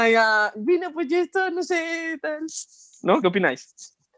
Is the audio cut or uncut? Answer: uncut